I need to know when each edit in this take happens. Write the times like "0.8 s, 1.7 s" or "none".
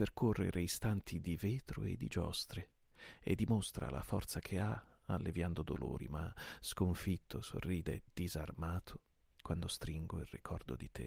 none